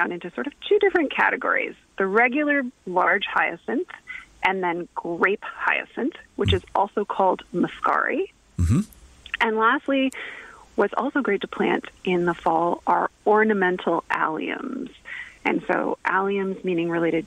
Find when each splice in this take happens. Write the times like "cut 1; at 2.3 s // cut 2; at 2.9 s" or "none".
none